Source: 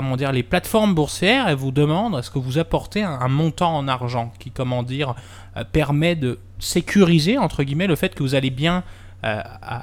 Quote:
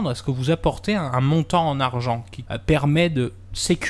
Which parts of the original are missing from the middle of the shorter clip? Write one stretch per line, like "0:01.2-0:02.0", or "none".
0:04.5-0:05.5